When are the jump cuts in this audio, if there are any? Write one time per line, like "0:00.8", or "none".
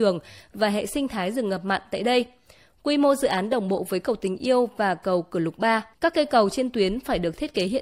0:05.9